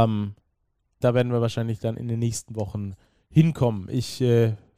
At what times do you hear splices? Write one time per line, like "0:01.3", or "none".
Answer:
0:01.0